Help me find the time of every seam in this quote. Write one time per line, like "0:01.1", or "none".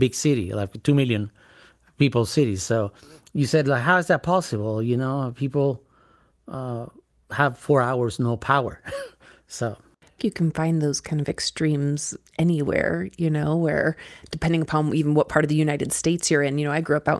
0:10.2